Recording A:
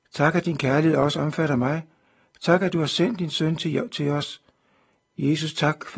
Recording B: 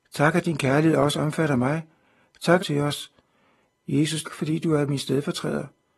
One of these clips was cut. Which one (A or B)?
B